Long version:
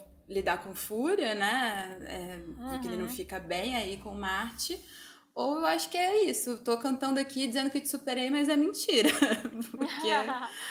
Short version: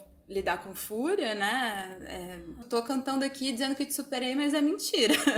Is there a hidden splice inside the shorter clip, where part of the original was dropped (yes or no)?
yes